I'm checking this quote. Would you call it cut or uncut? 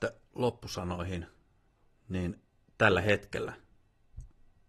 uncut